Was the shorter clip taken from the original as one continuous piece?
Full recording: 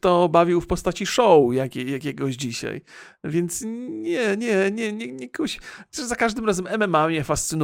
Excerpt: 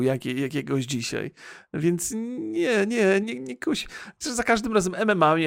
no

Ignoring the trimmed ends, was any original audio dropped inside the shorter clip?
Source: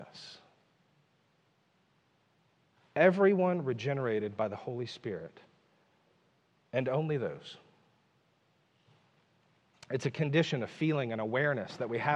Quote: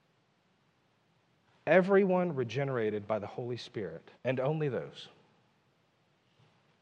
yes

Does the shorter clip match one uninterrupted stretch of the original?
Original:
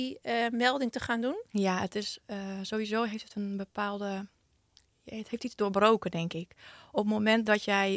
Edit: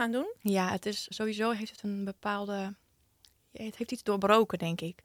no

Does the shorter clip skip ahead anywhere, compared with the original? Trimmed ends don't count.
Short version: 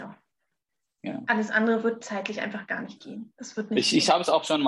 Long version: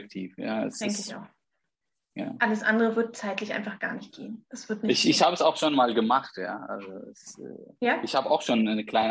no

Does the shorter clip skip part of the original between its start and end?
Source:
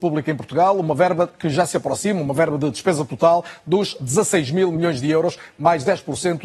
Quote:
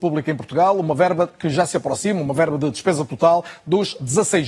no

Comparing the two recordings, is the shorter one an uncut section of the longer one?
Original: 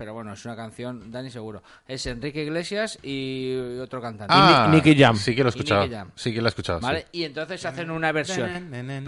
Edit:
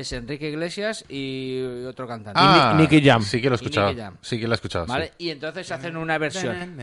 yes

